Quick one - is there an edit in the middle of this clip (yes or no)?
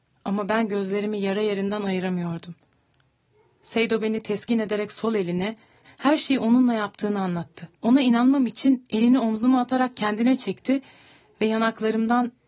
yes